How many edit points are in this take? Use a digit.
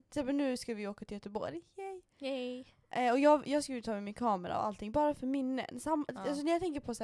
0